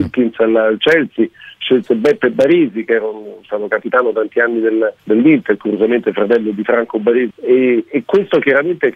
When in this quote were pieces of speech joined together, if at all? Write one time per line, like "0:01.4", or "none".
0:05.0
0:07.3

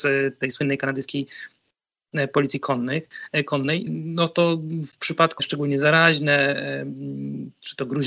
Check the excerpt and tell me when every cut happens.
0:03.9
0:05.4

